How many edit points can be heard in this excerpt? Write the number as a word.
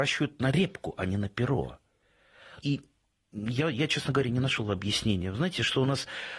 one